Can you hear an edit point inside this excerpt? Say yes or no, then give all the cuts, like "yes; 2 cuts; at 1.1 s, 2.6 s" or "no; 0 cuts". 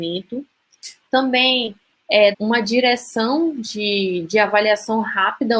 yes; 1 cut; at 2.3 s